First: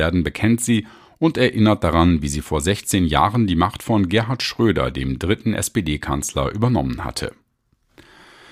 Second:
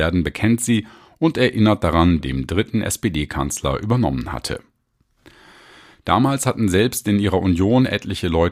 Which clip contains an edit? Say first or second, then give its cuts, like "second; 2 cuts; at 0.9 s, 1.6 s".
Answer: second; 1 cut; at 2.2 s